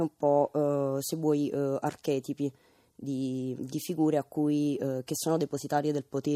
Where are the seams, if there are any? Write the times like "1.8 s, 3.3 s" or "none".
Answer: 3.6 s